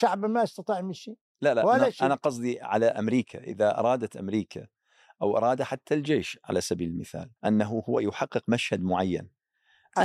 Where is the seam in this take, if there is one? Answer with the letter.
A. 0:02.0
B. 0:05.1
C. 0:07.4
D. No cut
C